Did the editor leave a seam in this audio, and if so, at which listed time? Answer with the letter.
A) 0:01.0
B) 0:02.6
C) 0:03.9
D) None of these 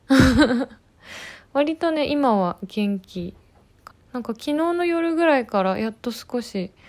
C